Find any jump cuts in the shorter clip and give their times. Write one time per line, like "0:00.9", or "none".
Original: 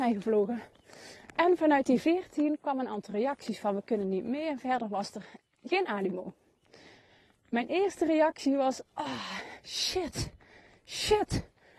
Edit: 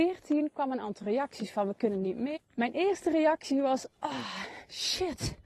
0:02.4